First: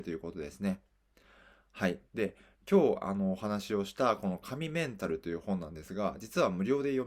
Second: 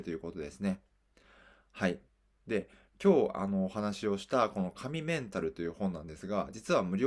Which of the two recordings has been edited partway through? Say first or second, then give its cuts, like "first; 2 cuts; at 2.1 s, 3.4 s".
first; 1 cut; at 2.1 s